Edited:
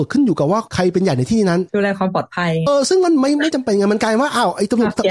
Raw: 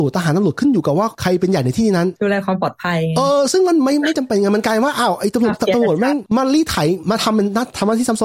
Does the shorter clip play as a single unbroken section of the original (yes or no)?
no